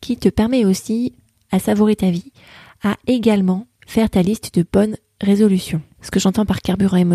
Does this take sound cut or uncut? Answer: cut